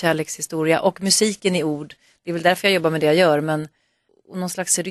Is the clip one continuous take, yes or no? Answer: yes